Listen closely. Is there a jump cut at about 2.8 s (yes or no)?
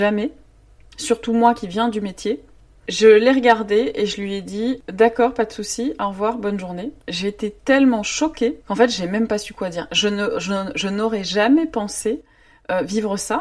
no